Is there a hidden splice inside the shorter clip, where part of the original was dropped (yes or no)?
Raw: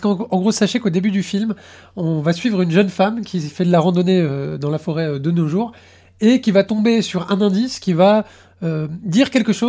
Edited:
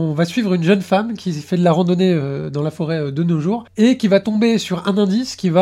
yes